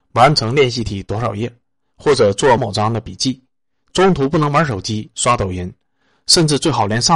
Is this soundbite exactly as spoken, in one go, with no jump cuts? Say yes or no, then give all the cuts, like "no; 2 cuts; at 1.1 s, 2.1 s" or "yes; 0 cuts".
no; 1 cut; at 2.6 s